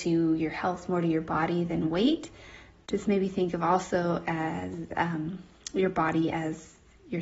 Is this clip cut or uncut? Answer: uncut